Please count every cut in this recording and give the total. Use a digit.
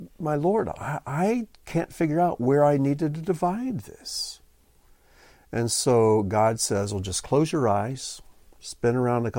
0